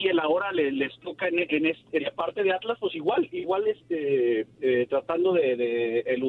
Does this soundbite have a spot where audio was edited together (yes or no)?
yes